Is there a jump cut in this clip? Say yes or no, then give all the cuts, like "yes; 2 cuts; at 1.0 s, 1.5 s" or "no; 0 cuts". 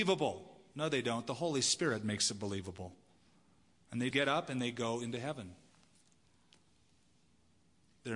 yes; 1 cut; at 4.1 s